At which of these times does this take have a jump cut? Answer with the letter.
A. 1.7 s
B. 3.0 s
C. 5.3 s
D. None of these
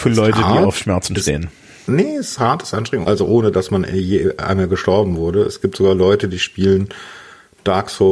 B